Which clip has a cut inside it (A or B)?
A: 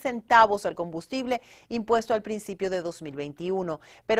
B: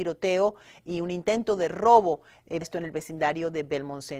B